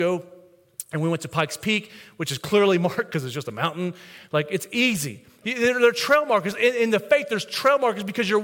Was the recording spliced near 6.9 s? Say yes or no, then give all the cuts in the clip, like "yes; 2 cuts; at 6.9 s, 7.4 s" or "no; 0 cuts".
no; 1 cut; at 5.4 s